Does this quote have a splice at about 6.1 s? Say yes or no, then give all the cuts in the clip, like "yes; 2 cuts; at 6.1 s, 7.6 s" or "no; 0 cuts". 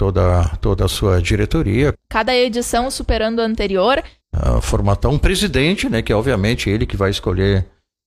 no; 2 cuts; at 1.9 s, 4.2 s